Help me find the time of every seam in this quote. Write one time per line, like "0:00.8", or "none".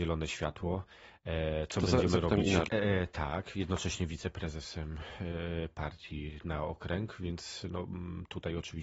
0:02.7